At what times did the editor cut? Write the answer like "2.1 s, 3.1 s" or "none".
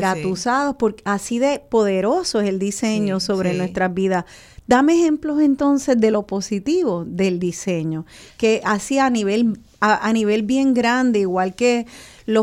none